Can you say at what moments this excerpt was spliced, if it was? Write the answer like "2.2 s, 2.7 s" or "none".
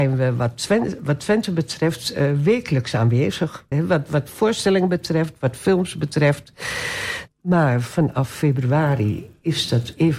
3.7 s, 7.3 s